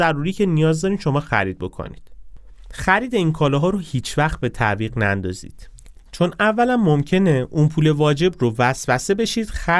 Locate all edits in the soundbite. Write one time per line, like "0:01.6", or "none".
0:06.1